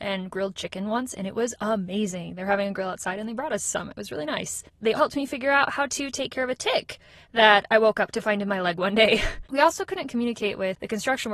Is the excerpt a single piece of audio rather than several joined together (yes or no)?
no